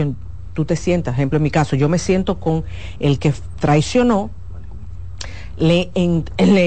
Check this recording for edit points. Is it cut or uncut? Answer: uncut